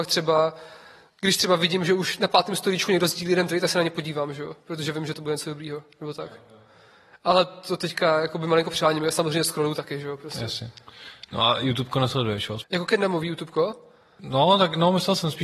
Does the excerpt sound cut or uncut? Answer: cut